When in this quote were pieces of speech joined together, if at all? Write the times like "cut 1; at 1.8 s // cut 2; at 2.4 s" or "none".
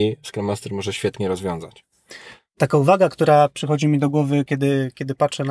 none